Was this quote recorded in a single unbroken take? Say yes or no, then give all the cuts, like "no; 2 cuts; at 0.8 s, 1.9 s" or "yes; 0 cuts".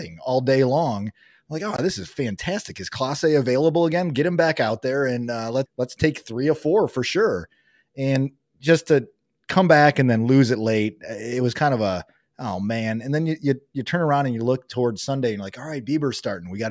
yes; 0 cuts